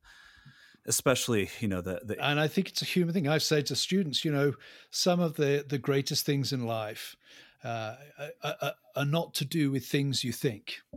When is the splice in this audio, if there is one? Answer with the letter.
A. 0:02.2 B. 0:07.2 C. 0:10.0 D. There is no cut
A